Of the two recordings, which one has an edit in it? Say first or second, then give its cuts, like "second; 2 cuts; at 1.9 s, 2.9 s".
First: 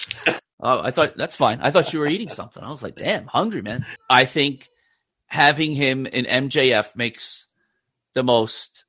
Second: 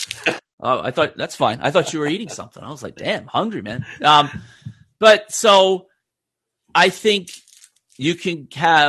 first; 1 cut; at 4.0 s